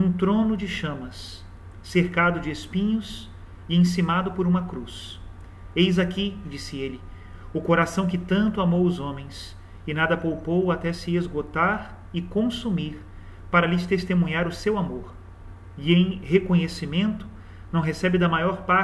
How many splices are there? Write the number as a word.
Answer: zero